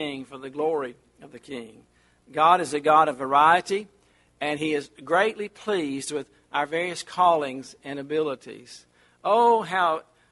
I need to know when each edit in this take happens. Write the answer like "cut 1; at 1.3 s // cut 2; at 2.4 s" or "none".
none